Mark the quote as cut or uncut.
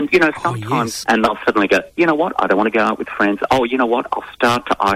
cut